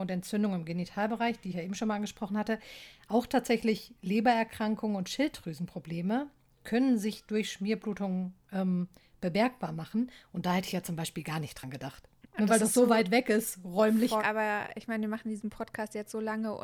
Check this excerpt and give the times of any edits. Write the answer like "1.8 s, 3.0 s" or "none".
12.2 s, 14.2 s